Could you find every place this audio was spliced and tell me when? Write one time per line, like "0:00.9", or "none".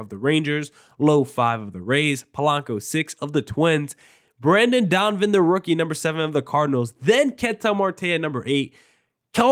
none

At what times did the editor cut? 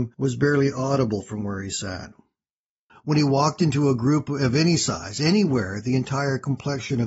0:02.9

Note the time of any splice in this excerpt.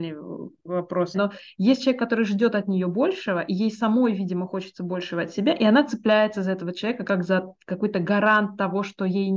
0:01.1

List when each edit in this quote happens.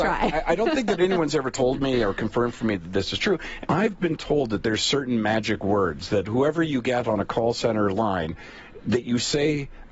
0:03.6

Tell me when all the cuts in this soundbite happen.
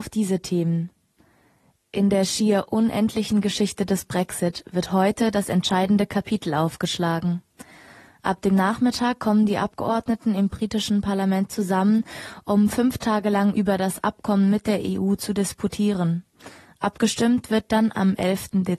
none

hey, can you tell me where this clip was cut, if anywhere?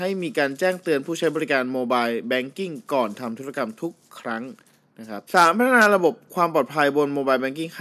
0:05.3

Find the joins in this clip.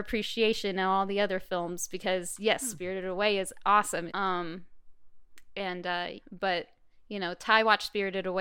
0:04.1
0:06.2

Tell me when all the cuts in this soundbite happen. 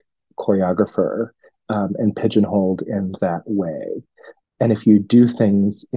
none

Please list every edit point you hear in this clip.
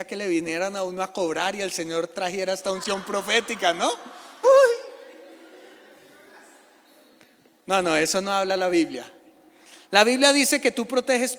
0:04.4

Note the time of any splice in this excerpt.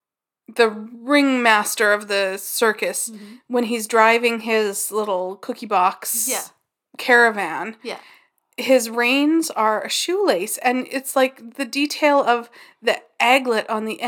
none

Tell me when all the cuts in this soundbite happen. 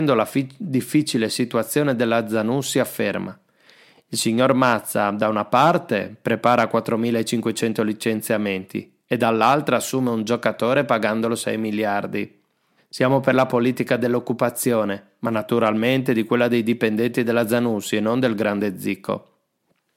0:12.8

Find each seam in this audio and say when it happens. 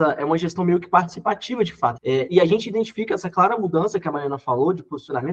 0:02.0

